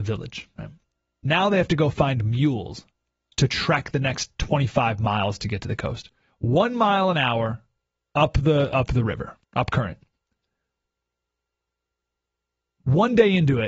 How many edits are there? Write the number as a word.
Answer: two